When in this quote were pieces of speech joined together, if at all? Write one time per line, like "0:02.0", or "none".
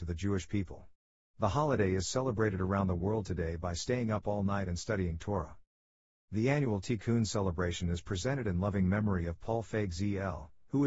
none